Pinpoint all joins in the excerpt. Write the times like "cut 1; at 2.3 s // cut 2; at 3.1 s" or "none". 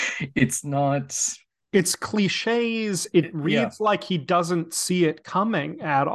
none